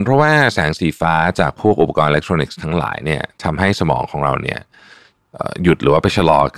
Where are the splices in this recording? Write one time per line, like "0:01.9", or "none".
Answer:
none